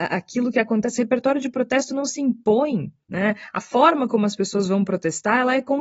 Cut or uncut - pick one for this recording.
uncut